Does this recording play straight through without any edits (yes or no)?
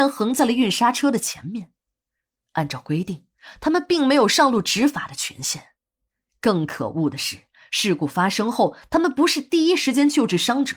yes